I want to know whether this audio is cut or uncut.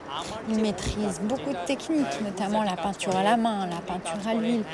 uncut